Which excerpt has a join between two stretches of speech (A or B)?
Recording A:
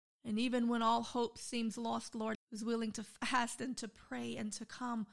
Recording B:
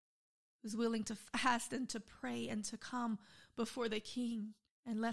A